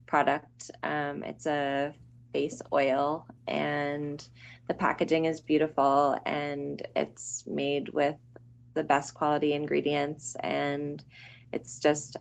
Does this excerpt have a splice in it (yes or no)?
yes